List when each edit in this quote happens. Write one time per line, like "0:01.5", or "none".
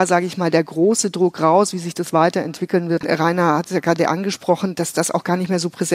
0:03.0